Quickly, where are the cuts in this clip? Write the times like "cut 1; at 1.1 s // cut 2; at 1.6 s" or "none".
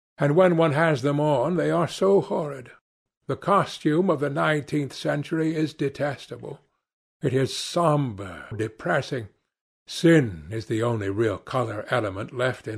cut 1; at 3.1 s // cut 2; at 8.5 s